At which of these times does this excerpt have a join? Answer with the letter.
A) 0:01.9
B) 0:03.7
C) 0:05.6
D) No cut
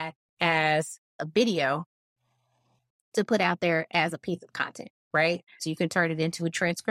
C